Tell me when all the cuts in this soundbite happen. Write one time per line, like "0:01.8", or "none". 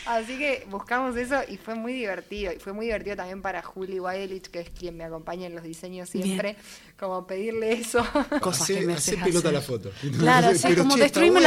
0:08.4